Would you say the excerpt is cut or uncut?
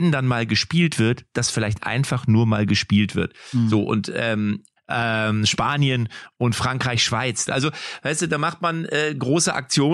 cut